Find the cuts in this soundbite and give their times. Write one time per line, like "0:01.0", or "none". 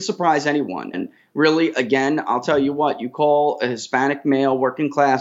0:00.9

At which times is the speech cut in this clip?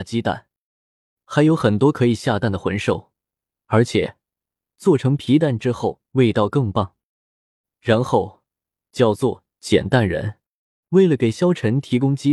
0:03.6
0:08.8
0:10.8

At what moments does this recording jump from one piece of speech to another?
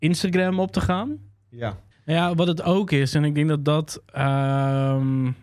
0:01.9

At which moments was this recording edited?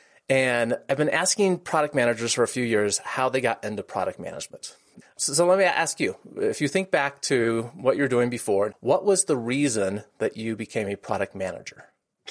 0:05.0

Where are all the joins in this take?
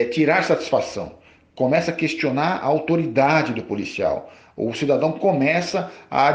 none

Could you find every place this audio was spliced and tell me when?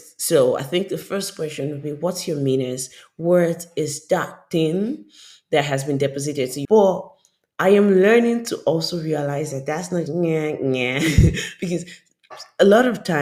0:06.6
0:10.1

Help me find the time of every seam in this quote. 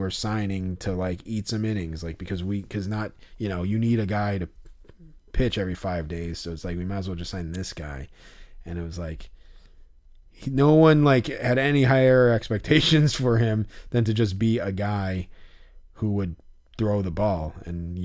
none

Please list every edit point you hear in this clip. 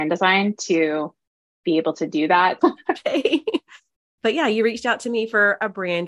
0:02.6
0:04.2

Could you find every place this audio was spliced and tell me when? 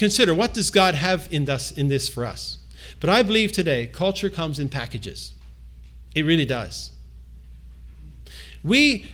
none

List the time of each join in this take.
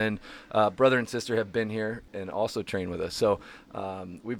none

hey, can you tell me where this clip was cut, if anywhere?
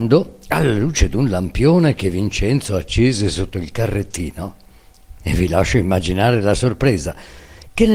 0:05.2

